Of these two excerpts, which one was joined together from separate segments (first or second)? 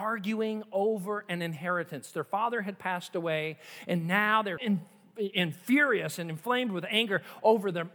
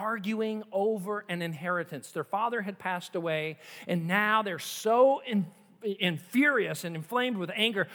first